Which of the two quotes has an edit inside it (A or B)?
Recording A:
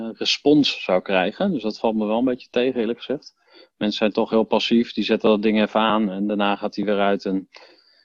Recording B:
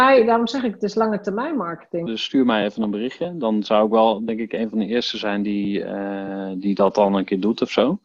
B